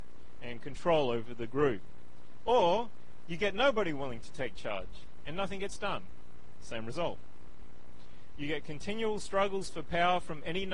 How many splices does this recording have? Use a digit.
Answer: 1